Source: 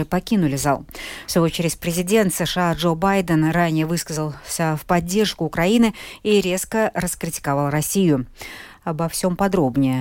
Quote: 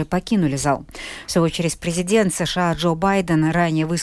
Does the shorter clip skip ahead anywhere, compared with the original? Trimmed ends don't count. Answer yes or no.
no